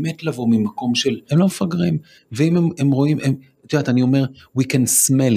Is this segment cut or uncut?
cut